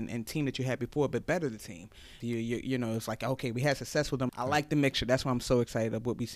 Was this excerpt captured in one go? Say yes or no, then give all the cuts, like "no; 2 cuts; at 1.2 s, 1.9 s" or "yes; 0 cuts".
no; 2 cuts; at 2.2 s, 4.3 s